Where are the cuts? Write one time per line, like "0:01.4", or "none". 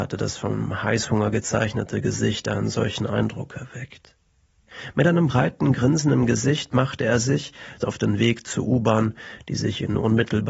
0:07.8